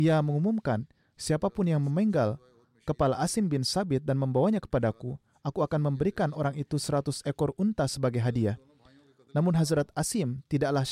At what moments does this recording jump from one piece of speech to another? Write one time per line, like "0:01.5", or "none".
none